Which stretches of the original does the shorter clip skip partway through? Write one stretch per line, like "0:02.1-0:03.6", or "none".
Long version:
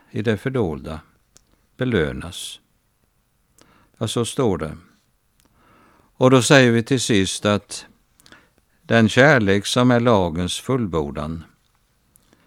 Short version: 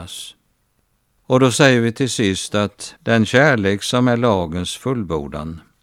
0:03.4-0:06.1
0:07.9-0:08.8